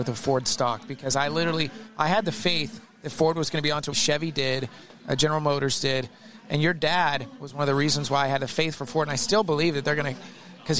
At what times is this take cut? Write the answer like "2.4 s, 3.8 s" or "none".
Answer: 3.9 s